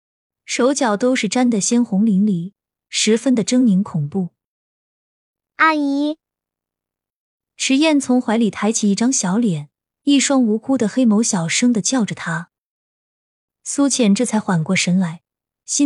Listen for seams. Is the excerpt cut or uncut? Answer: uncut